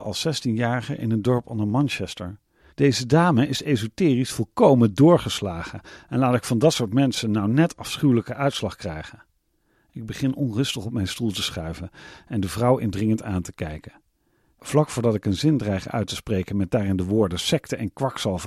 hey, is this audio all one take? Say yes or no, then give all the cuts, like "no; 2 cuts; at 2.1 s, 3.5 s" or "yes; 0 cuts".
no; 1 cut; at 2.7 s